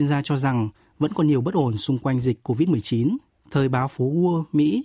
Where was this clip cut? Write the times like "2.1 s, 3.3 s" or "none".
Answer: 3.4 s